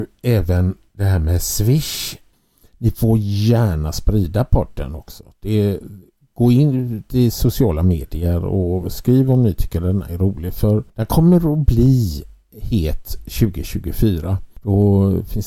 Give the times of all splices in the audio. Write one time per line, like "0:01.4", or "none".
0:10.9